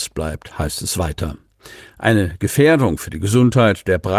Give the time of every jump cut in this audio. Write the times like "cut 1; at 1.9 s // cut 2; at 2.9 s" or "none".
none

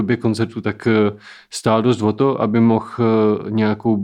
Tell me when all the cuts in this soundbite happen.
none

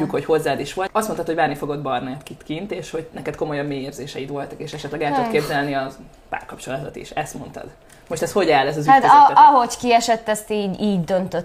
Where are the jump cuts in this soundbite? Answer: none

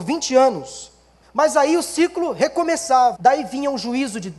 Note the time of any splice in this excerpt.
cut 1; at 1.2 s // cut 2; at 3.1 s

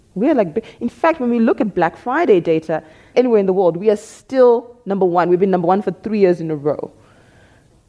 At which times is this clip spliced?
cut 1; at 3.1 s

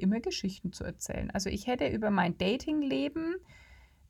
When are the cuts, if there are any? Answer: none

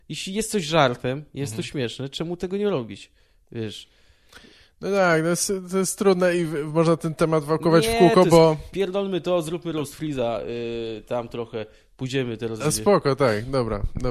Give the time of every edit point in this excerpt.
none

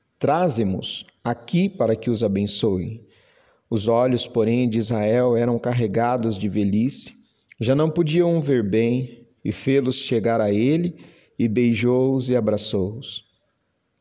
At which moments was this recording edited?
none

